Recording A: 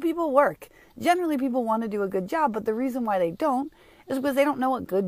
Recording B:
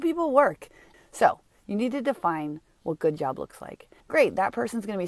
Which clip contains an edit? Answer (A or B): B